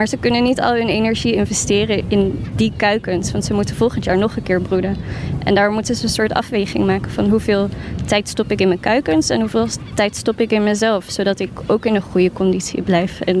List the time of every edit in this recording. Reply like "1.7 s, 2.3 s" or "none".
2.0 s